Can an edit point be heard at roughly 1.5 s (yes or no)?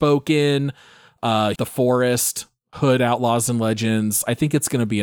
yes